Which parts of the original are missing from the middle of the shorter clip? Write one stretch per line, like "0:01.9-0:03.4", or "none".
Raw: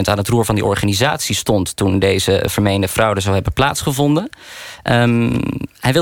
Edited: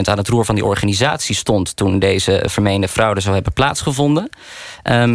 none